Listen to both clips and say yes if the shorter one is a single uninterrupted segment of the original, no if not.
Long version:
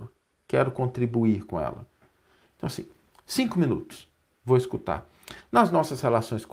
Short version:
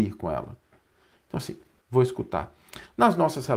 no